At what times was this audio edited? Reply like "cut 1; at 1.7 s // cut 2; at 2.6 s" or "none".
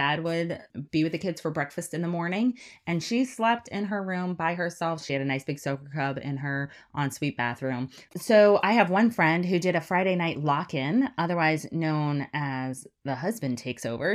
cut 1; at 5.0 s // cut 2; at 8.1 s